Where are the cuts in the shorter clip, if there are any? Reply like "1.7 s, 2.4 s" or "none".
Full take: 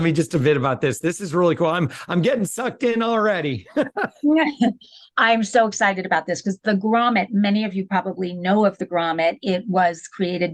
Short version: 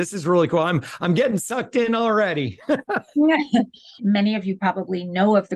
4.0 s